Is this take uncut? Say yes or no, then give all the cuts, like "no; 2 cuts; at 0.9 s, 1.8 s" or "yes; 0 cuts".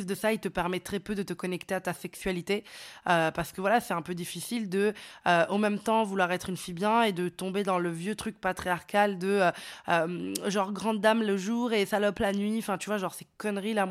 yes; 0 cuts